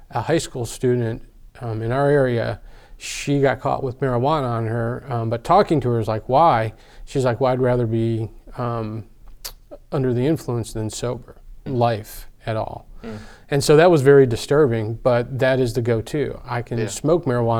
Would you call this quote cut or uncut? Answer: cut